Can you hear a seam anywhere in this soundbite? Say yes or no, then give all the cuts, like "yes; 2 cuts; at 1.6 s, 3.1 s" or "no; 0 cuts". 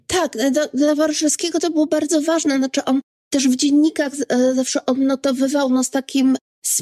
no; 0 cuts